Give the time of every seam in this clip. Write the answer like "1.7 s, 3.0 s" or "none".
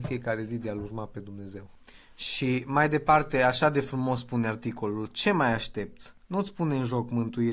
none